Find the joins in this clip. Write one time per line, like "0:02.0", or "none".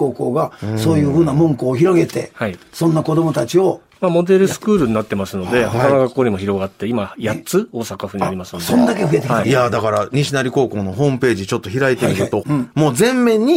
0:09.4
0:12.4